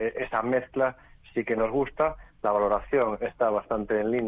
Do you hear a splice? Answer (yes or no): no